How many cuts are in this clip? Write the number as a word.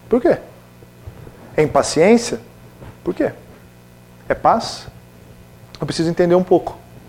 one